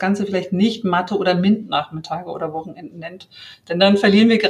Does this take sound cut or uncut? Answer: uncut